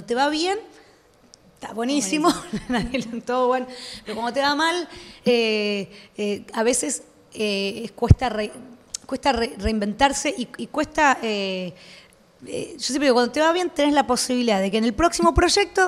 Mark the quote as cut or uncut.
uncut